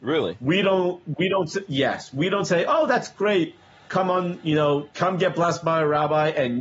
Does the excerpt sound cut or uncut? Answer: cut